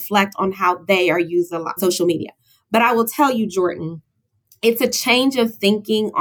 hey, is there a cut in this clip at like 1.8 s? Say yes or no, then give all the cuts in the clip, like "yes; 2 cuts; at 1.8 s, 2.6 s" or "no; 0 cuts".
yes; 1 cut; at 1.8 s